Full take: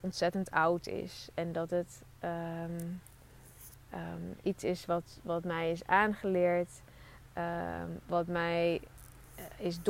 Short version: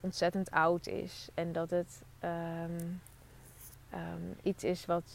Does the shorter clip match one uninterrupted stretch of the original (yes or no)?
yes